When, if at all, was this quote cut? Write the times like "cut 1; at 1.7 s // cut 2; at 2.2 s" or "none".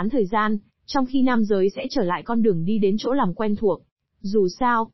cut 1; at 4.0 s